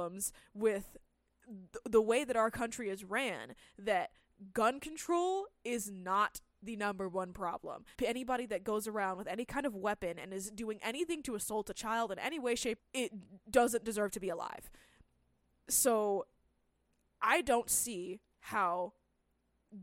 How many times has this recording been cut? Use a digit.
2